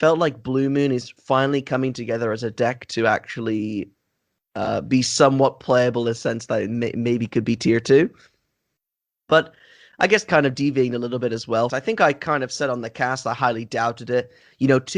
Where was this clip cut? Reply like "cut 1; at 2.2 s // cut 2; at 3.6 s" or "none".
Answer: cut 1; at 11.7 s

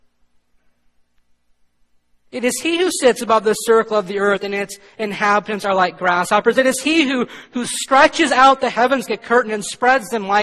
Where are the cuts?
cut 1; at 9.1 s

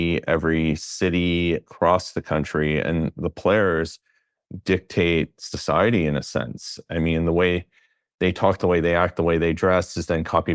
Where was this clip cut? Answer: none

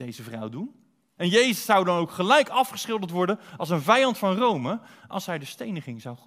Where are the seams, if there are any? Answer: cut 1; at 1.2 s

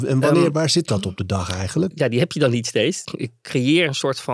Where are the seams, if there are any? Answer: cut 1; at 1.9 s // cut 2; at 3.0 s

